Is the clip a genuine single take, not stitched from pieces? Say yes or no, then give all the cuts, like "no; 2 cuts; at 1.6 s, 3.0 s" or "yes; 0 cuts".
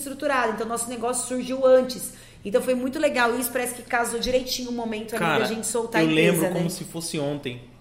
yes; 0 cuts